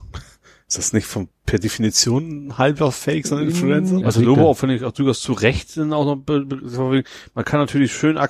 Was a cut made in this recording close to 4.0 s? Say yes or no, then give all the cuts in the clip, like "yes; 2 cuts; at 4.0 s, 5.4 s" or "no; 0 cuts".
yes; 1 cut; at 4.0 s